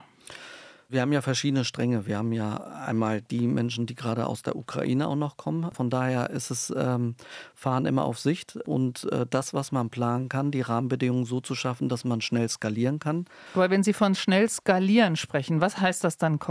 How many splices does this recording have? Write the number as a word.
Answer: one